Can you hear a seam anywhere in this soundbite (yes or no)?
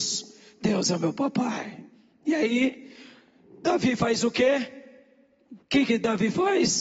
no